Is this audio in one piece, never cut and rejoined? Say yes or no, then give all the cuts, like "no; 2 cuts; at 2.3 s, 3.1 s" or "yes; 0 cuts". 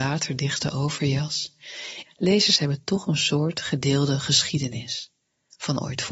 no; 1 cut; at 2.0 s